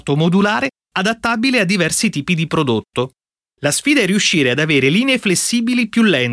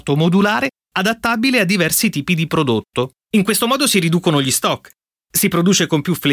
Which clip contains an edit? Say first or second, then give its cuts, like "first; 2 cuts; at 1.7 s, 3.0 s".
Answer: second; 1 cut; at 3.2 s